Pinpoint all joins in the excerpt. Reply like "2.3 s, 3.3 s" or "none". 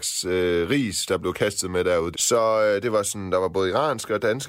2.1 s